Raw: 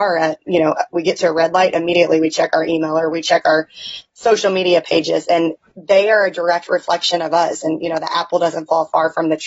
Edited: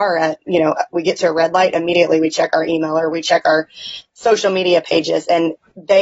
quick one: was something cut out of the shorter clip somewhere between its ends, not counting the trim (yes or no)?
no